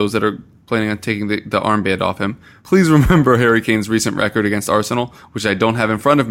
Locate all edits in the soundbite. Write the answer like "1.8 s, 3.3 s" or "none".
2.6 s